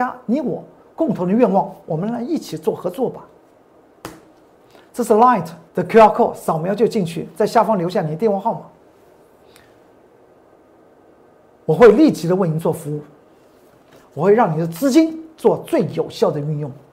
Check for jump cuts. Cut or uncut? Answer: cut